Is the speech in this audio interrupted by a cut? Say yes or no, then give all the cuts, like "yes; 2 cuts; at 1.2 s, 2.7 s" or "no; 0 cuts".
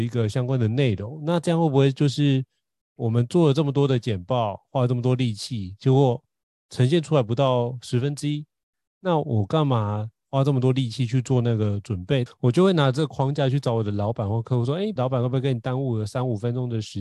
yes; 2 cuts; at 12.3 s, 15.0 s